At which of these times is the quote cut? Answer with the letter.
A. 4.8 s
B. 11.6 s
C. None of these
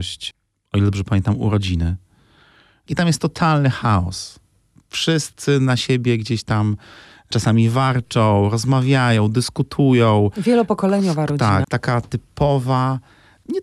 B